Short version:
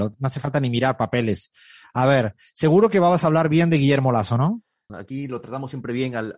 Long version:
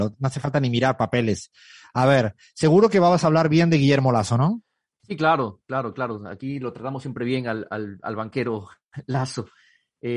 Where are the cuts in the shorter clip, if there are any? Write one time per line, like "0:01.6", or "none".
0:04.9